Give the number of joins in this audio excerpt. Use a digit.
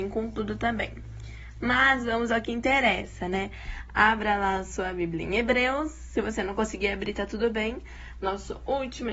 1